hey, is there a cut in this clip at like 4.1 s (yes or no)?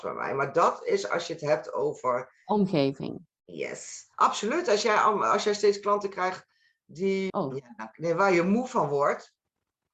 yes